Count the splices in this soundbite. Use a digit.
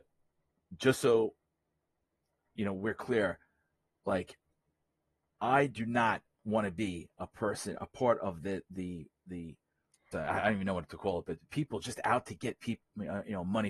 1